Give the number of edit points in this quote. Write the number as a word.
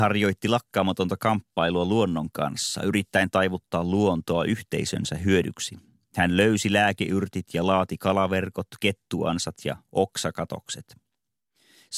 zero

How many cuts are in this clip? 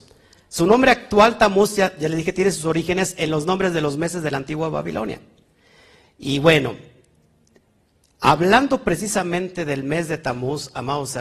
zero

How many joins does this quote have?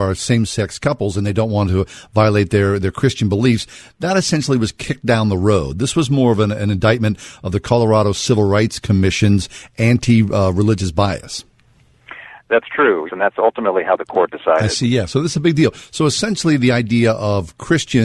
one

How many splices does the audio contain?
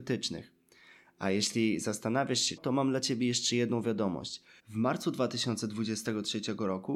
two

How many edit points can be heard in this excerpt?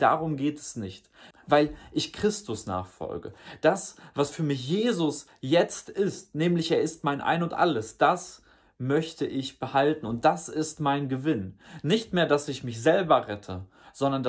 one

